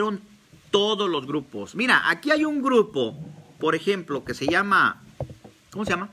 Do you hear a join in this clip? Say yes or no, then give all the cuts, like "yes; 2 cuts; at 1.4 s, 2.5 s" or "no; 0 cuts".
no; 0 cuts